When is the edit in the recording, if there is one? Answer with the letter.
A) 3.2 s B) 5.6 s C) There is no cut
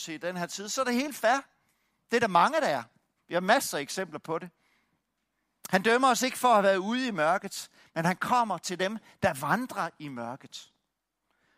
A